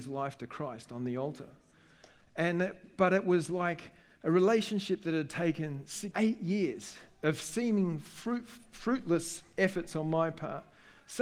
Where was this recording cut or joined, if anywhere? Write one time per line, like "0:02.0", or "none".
0:06.1